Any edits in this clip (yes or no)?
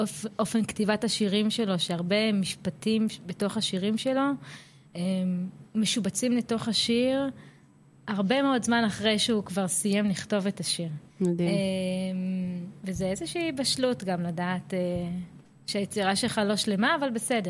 yes